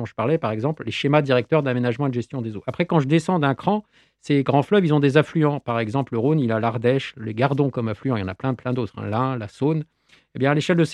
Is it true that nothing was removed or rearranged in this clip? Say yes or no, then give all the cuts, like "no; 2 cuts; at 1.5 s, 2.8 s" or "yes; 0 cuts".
yes; 0 cuts